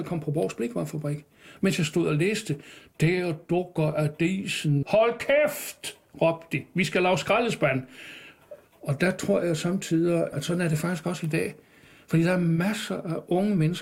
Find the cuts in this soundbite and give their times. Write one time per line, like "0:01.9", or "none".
0:04.8
0:08.7
0:10.3